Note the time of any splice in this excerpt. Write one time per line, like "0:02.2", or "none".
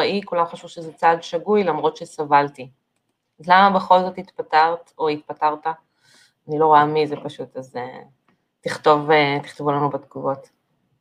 none